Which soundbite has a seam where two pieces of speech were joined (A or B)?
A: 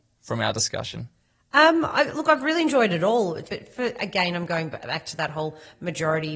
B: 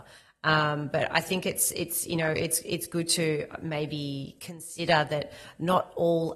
A